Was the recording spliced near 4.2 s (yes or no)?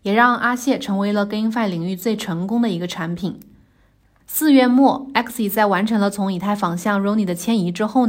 yes